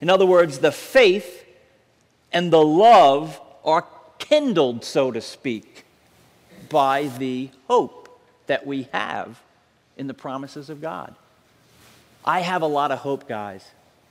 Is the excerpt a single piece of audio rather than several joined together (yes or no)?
yes